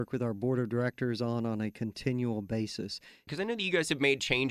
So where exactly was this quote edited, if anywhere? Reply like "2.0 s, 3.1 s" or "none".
3.3 s